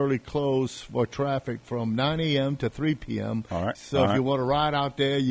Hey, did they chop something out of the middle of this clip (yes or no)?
yes